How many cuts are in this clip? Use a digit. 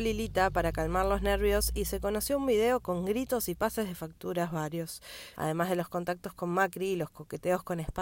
1